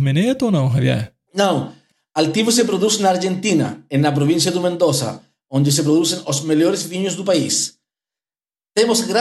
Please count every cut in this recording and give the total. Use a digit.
0